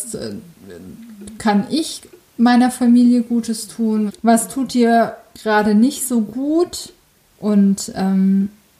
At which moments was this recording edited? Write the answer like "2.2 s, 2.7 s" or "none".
4.1 s, 7.3 s